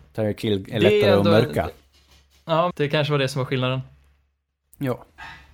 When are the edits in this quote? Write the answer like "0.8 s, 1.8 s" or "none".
2.7 s